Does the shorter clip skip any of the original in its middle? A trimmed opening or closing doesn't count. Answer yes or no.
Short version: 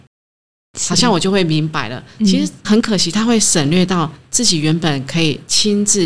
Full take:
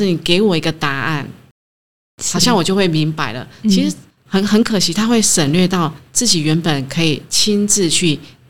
yes